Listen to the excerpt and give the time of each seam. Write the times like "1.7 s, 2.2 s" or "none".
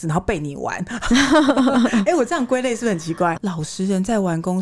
3.4 s